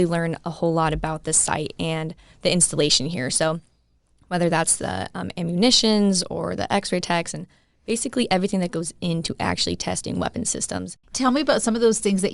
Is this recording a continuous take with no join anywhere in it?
no; 1 cut; at 11.0 s

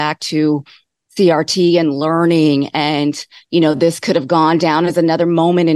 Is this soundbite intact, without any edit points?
yes; 0 cuts

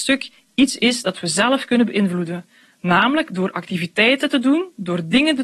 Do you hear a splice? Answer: no; 0 cuts

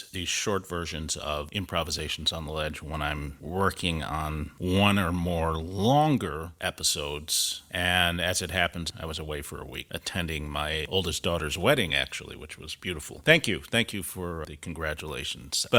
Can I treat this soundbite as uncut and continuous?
yes; 0 cuts

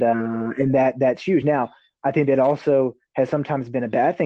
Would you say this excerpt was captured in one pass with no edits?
yes; 0 cuts

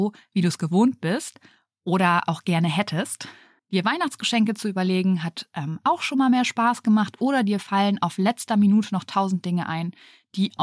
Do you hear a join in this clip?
no; 0 cuts

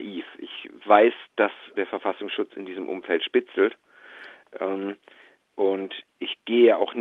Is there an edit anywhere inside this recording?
no; 0 cuts

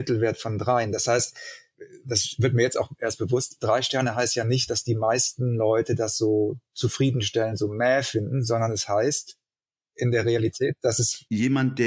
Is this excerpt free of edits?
yes; 0 cuts

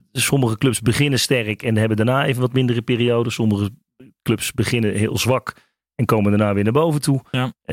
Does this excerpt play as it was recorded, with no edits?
yes; 0 cuts

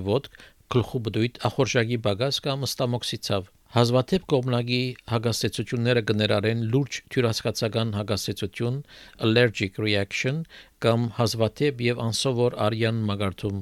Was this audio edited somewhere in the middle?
yes; 1 cut; at 3.6 s

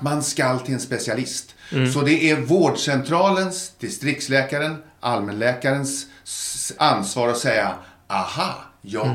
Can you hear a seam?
yes; 1 cut; at 6.8 s

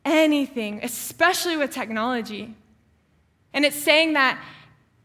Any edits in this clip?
yes; 1 cut; at 3.5 s

